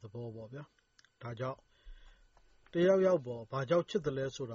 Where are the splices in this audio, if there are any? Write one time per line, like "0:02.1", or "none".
none